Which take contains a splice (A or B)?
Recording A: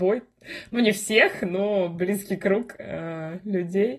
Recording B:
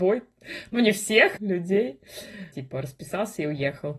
B